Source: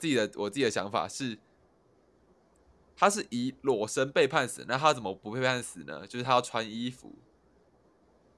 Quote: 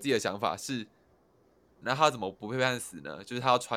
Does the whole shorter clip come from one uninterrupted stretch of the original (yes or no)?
no